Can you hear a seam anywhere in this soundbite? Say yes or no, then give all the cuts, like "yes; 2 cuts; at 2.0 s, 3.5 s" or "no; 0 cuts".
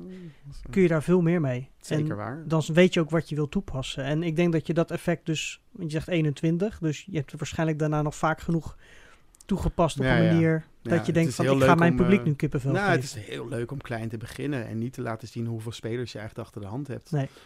no; 0 cuts